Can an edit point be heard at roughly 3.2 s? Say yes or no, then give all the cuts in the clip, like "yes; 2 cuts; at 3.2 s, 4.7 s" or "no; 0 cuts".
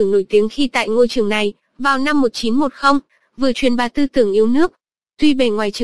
yes; 1 cut; at 3.2 s